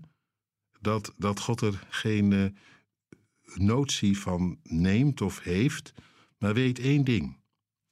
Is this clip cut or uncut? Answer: uncut